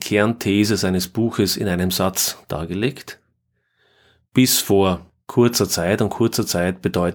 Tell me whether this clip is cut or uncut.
uncut